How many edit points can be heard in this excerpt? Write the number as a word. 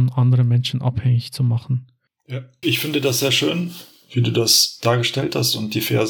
one